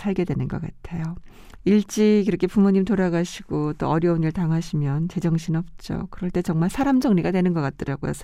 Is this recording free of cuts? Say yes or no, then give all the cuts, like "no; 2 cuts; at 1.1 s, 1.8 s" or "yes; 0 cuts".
no; 1 cut; at 1.6 s